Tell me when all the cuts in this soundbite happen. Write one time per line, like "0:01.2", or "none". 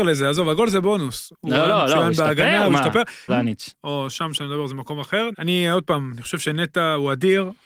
0:03.3
0:05.3